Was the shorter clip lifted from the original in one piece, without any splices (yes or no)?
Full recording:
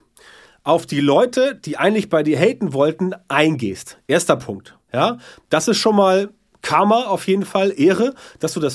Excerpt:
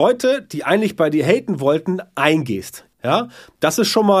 no